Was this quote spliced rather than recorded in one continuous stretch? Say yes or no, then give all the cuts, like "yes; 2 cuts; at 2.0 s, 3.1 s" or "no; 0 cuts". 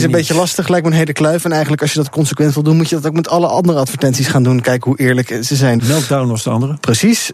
yes; 1 cut; at 5.8 s